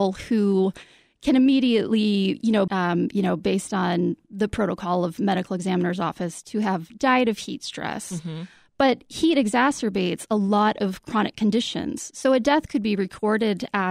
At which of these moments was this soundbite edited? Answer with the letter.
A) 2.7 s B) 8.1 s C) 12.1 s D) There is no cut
A